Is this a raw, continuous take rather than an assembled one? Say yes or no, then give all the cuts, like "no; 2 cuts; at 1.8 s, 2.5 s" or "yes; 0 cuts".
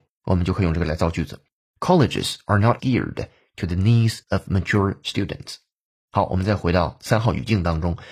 no; 1 cut; at 2.8 s